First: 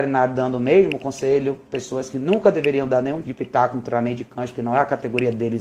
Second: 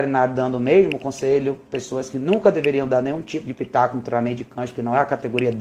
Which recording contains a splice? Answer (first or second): first